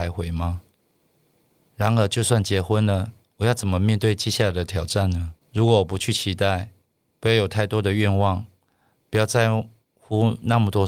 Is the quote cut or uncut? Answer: cut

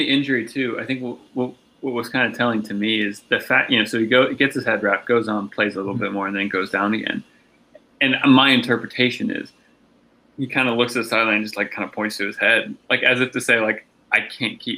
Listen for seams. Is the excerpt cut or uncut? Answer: uncut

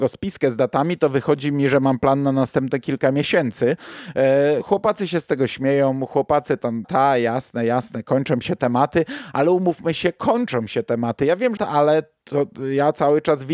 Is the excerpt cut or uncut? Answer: cut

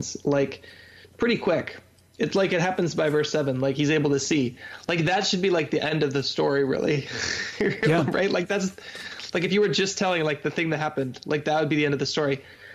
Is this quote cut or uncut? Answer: uncut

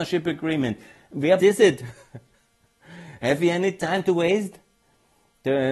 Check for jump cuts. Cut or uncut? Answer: cut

